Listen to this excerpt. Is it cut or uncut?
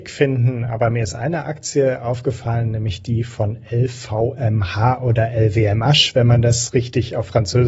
uncut